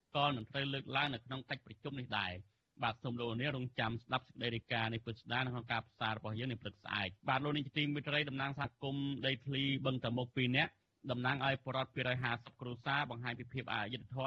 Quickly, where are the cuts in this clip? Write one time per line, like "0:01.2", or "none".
0:07.2